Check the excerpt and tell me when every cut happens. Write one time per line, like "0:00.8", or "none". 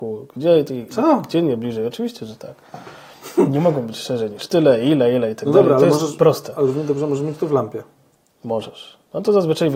none